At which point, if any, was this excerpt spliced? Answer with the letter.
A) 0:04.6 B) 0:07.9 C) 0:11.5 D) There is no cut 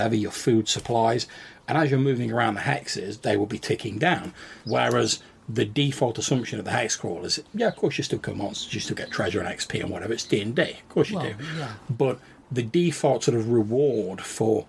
A